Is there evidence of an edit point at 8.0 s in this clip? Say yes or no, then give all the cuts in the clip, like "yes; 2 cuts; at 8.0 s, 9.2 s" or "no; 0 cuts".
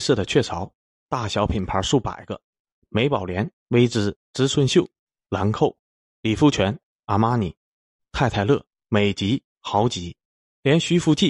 yes; 2 cuts; at 4.3 s, 8.0 s